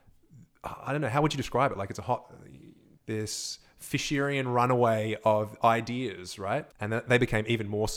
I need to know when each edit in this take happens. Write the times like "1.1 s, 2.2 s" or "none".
3.0 s, 6.7 s

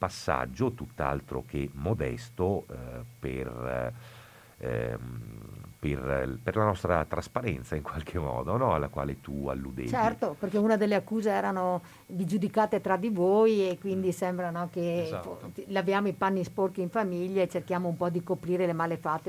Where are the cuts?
none

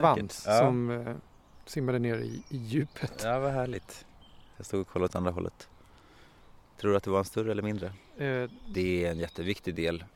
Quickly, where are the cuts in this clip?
4.5 s, 8.7 s

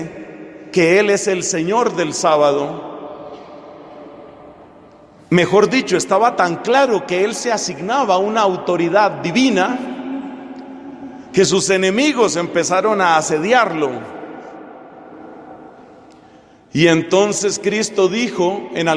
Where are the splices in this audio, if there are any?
none

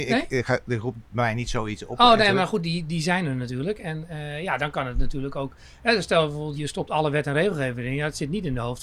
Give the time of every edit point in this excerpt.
6.6 s

